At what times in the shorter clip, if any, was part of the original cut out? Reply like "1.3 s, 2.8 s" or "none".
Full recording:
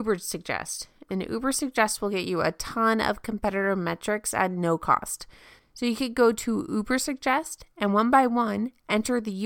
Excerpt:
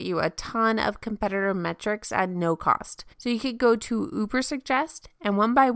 3.1 s